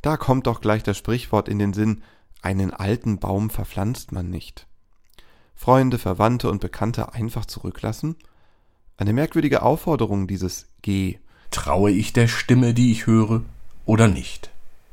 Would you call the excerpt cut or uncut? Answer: cut